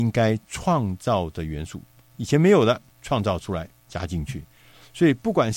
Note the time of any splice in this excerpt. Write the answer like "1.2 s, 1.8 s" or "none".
2.9 s